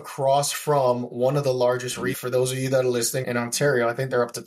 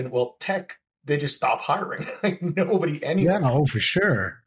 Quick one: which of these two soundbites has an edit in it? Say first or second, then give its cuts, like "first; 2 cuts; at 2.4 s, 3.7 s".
first; 2 cuts; at 2.1 s, 3.2 s